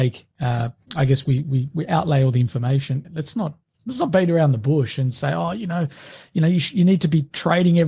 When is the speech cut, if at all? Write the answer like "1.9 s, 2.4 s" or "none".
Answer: 3.0 s